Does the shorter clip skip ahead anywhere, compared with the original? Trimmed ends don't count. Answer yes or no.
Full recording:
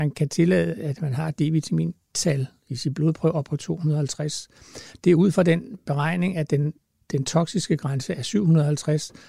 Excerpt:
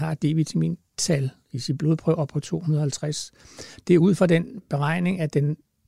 no